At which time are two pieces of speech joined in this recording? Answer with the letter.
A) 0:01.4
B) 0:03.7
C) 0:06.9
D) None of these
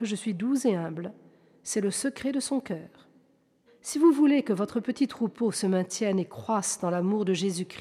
B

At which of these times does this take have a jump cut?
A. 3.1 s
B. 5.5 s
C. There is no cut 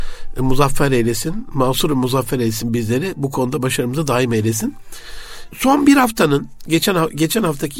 C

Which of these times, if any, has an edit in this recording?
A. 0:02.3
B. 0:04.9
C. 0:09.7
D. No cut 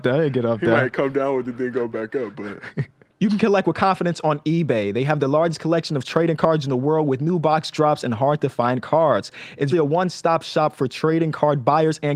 C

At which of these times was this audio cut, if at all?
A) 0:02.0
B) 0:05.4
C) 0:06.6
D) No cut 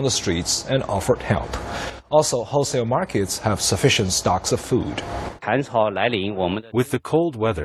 B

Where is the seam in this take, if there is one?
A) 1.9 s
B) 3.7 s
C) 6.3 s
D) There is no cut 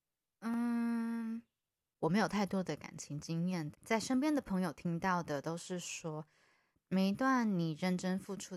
B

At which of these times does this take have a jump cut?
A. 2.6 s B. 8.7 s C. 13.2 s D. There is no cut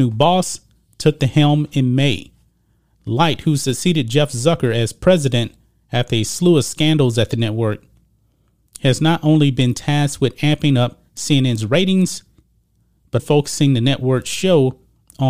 C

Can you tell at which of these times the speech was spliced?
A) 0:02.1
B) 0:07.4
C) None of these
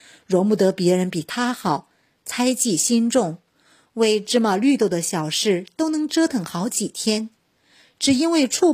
C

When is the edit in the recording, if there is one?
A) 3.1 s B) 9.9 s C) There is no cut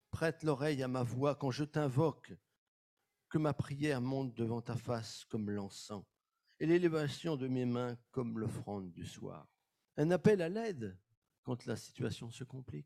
B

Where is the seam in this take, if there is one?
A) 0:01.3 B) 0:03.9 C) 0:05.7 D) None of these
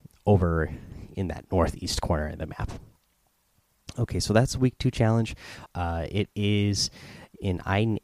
C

